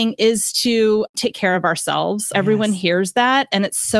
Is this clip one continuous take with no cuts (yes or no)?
no